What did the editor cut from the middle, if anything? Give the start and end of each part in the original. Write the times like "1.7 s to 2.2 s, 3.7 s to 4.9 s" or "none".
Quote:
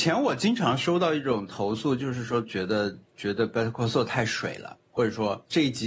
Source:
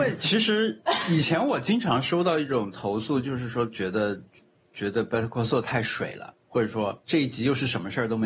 4.3 s to 4.6 s